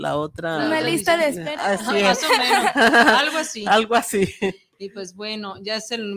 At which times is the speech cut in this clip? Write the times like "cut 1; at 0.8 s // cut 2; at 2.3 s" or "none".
none